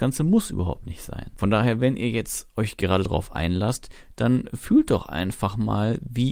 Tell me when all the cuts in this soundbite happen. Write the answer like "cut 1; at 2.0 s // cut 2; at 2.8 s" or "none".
none